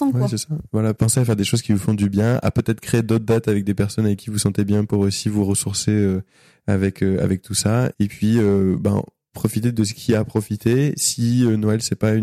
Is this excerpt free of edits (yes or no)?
yes